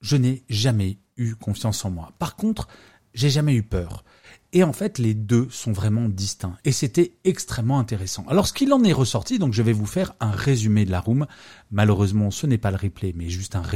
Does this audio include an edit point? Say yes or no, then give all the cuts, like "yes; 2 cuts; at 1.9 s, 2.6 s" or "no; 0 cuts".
yes; 1 cut; at 6.6 s